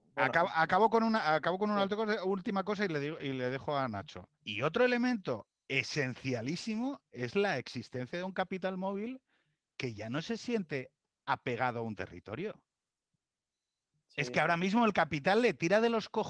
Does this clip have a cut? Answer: yes; 1 cut; at 4.3 s

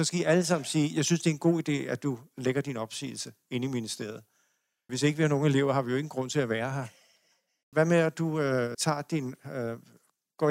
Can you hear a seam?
yes; 3 cuts; at 4.9 s, 7.7 s, 8.7 s

